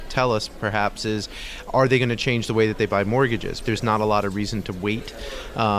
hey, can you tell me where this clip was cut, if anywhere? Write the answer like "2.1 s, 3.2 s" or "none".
3.6 s